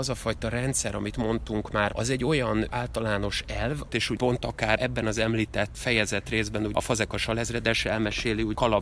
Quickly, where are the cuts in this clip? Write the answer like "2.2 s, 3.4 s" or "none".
1.9 s, 3.9 s